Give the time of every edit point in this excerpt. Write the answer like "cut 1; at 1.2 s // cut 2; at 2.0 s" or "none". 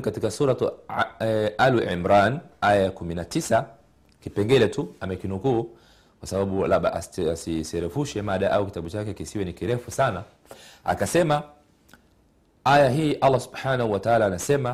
none